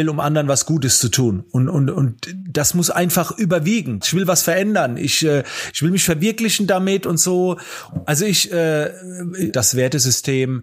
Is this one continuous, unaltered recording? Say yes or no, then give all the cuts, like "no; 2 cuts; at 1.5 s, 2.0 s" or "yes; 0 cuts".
no; 3 cuts; at 4.0 s, 7.9 s, 9.5 s